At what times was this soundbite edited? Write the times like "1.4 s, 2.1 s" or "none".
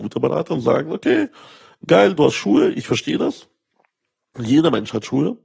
none